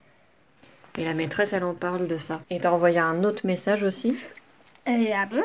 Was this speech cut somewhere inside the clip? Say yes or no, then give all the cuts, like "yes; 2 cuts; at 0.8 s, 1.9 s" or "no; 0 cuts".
yes; 1 cut; at 2.4 s